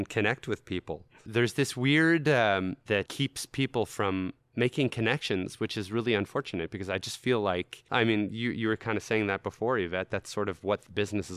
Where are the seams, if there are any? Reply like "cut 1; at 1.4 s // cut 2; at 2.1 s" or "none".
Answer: cut 1; at 2.9 s